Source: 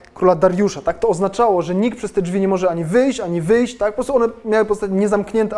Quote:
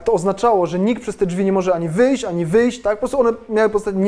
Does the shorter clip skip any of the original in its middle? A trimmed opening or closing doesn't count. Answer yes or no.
no